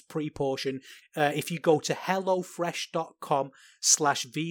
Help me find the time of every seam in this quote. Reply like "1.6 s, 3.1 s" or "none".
1.0 s